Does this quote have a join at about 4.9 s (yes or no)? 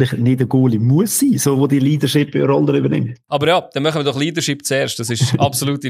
no